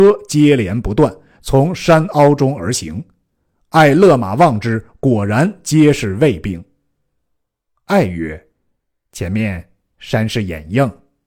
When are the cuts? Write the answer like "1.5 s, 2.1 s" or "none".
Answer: 7.2 s, 8.5 s